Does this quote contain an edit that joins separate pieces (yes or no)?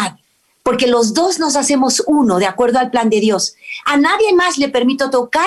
yes